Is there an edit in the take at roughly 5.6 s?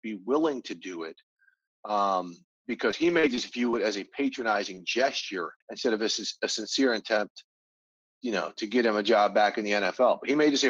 yes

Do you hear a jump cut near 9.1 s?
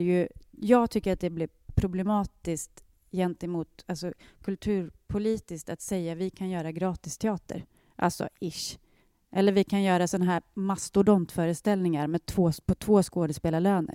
no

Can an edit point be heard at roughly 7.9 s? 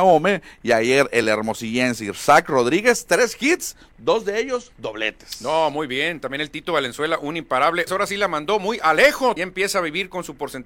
yes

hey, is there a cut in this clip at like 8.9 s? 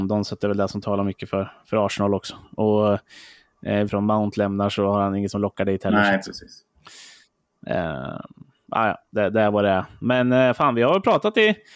no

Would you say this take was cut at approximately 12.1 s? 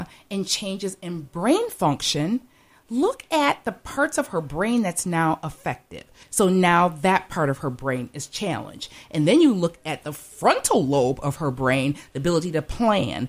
yes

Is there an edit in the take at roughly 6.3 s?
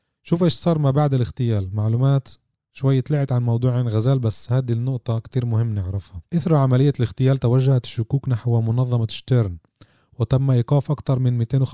yes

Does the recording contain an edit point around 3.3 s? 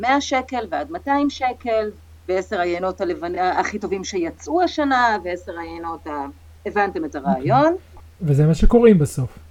no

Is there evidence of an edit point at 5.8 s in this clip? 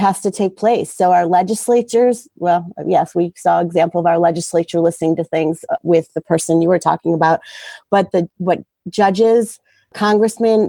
yes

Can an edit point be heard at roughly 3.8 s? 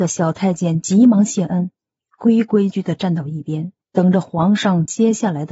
yes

